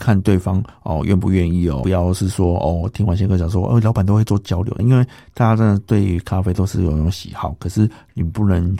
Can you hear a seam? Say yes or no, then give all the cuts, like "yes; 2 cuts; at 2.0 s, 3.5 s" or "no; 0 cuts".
yes; 1 cut; at 4.8 s